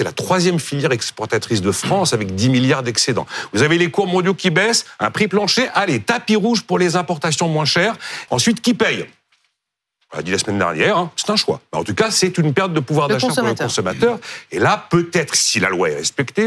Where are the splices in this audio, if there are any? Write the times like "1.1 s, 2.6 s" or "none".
8.3 s, 14.5 s